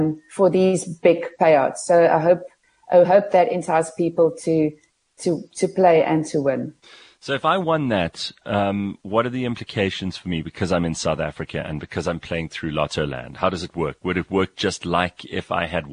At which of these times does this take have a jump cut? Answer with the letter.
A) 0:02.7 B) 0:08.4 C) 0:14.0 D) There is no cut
D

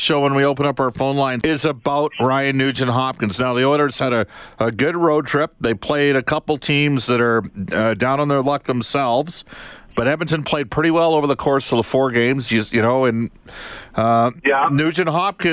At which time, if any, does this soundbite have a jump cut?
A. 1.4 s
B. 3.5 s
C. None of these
A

